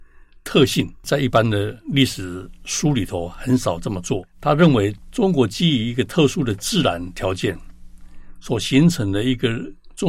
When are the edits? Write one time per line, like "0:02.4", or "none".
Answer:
none